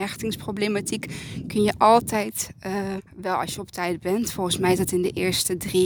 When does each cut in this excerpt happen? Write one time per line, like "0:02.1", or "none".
0:03.0